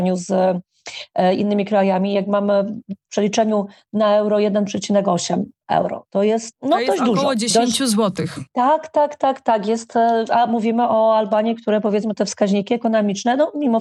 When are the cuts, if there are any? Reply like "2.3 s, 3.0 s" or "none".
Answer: none